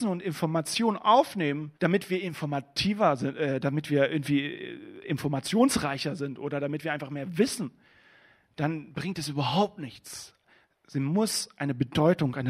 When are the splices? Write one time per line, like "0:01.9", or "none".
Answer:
0:01.8